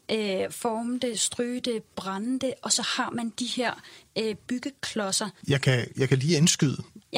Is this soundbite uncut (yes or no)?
no